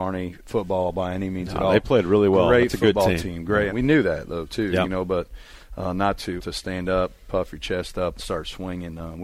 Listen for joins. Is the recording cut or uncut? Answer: cut